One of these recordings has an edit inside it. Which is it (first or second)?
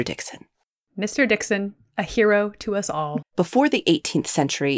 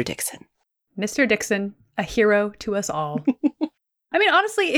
first